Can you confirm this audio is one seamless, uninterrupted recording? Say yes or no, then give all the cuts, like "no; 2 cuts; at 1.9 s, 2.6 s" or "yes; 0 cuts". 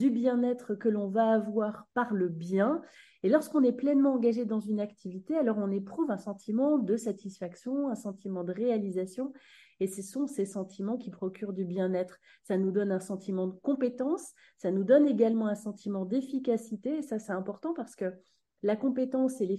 yes; 0 cuts